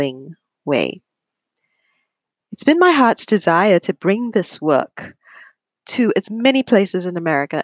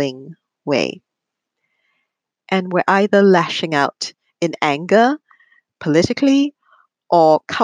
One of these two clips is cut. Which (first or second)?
second